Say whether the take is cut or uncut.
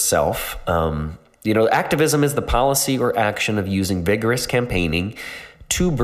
uncut